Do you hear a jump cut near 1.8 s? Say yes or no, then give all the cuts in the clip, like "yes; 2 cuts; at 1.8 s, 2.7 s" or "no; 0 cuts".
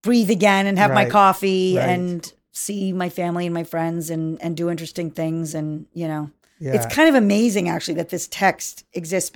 no; 0 cuts